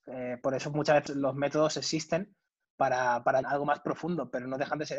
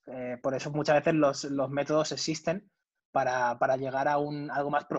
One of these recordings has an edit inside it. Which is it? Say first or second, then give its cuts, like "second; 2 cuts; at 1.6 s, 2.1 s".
first; 2 cuts; at 1.1 s, 3.4 s